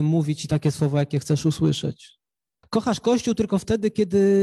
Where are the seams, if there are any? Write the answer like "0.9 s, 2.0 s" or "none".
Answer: none